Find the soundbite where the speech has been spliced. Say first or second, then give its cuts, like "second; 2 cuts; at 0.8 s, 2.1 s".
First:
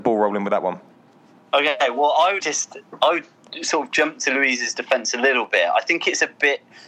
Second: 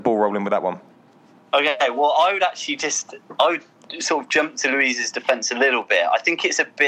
first; 1 cut; at 2.4 s